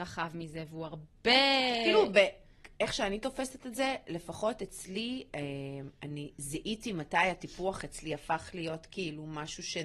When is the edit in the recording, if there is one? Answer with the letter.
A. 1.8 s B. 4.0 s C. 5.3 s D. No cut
C